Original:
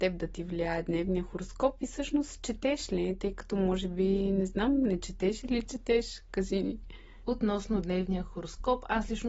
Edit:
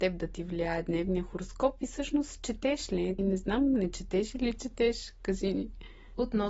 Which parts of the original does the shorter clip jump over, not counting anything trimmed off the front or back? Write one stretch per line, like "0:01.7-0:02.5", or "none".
0:03.2-0:04.3